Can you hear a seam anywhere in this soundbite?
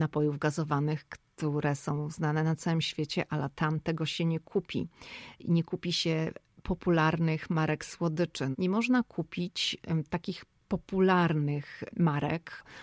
yes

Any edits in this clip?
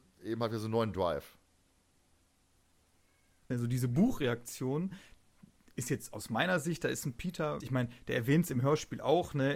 yes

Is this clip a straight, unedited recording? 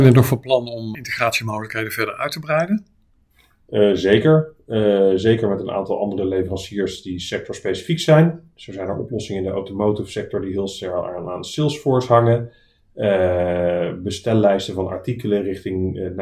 no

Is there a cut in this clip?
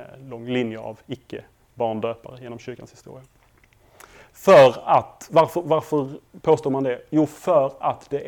no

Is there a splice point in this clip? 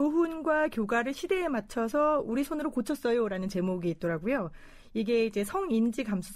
no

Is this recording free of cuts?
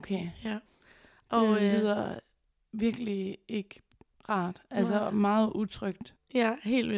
yes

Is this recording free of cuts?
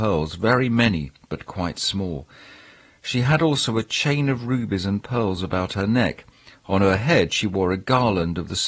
yes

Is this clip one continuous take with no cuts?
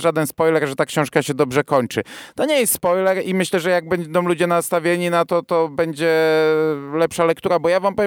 yes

